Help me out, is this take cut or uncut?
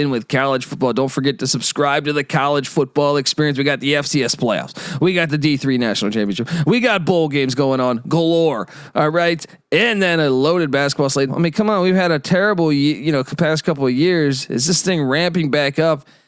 cut